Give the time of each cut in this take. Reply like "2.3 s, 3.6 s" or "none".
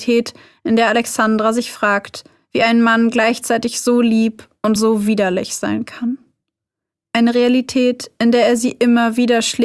none